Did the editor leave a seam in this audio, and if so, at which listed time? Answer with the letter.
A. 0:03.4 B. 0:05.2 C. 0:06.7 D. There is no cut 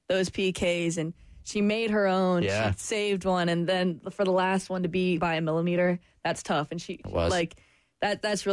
B